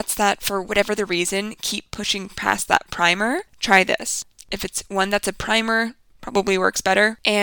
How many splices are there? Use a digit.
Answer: 1